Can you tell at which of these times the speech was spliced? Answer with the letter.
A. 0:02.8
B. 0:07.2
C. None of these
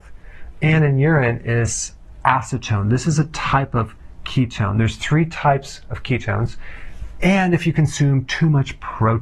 B